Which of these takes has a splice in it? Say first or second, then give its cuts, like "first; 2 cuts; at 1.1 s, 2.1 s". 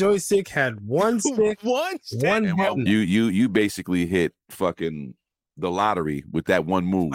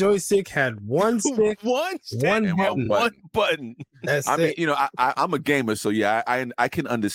first; 1 cut; at 2.9 s